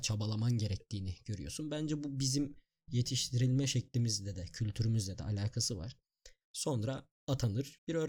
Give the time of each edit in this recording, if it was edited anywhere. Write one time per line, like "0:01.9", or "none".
0:06.4